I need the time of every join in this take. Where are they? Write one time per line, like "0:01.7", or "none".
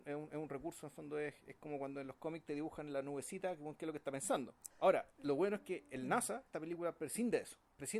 0:04.7
0:06.5